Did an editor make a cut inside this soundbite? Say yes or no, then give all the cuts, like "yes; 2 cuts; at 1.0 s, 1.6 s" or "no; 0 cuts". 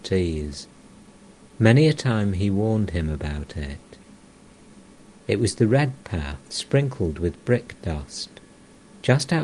yes; 2 cuts; at 5.2 s, 6.5 s